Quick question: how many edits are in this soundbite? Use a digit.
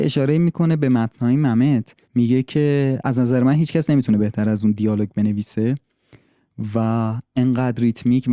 1